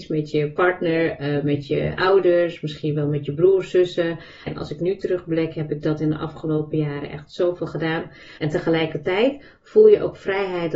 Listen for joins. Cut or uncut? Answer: cut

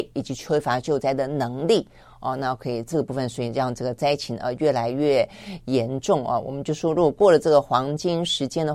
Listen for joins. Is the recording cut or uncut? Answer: uncut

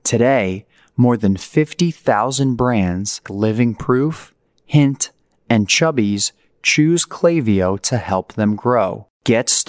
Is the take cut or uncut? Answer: cut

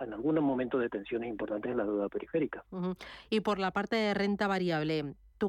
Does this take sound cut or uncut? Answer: uncut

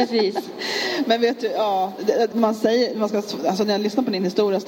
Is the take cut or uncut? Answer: cut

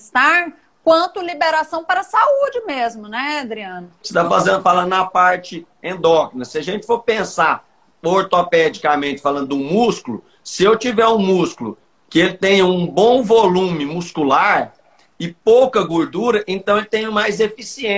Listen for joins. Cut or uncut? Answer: uncut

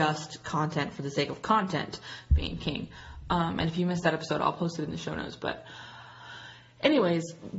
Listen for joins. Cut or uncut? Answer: uncut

